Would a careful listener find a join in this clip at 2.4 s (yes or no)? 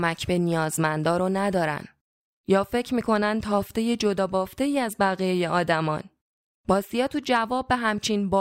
yes